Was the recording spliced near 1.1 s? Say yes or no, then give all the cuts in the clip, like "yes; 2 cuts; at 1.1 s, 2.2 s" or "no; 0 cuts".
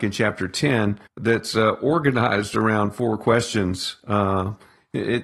yes; 1 cut; at 1.1 s